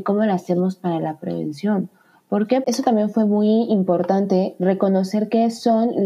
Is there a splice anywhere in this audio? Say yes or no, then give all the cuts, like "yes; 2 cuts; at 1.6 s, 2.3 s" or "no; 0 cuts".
yes; 1 cut; at 2.6 s